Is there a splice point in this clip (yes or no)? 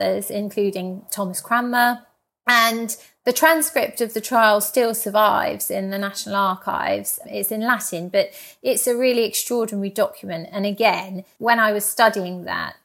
no